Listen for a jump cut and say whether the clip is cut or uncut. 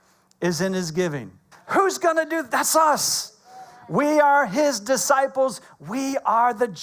cut